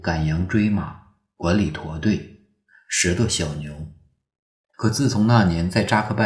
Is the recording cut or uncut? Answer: cut